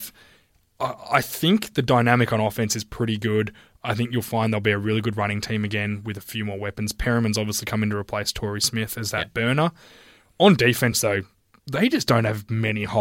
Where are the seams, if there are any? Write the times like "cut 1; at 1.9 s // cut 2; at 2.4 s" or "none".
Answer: none